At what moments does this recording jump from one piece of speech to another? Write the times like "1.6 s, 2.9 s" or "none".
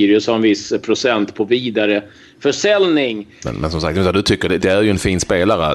3.4 s, 4.6 s